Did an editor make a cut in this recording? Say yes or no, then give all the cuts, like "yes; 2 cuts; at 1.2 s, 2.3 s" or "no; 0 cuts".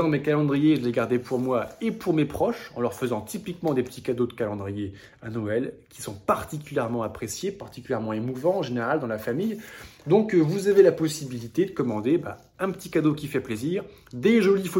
no; 0 cuts